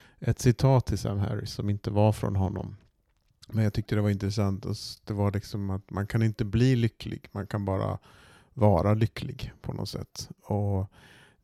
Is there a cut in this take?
no; 0 cuts

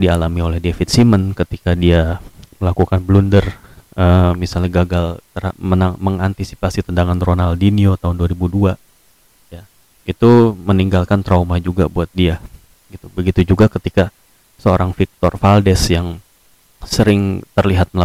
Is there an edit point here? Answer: no; 0 cuts

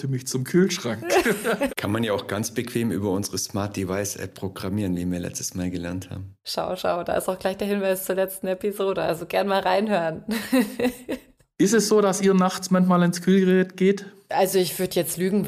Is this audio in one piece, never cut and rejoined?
no; 1 cut; at 1.7 s

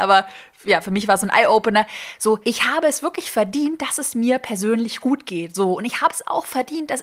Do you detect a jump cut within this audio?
yes; 1 cut; at 2.4 s

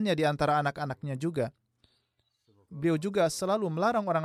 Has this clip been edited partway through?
yes; 1 cut; at 2.7 s

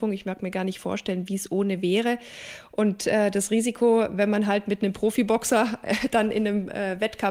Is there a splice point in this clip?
yes; 1 cut; at 2.7 s

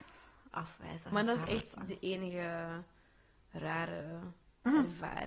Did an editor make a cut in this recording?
yes; 1 cut; at 1.8 s

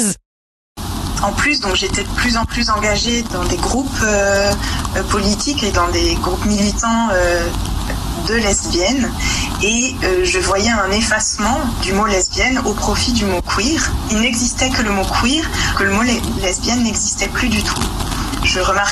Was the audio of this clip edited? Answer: yes; 1 cut; at 15.7 s

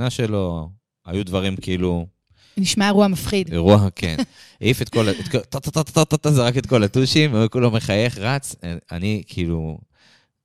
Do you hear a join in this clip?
no; 0 cuts

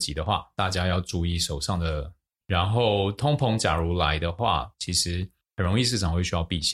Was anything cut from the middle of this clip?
yes; 2 cuts; at 2.4 s, 4.7 s

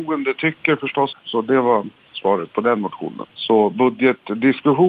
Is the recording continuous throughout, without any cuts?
no; 2 cuts; at 1.1 s, 3.2 s

